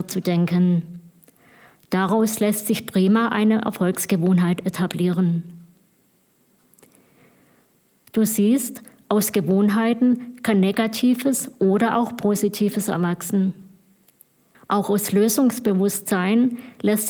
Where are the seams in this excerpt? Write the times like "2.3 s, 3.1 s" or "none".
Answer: 14.5 s